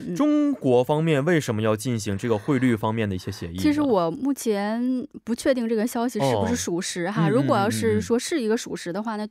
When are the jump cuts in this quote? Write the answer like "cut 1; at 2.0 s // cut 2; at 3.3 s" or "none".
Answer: none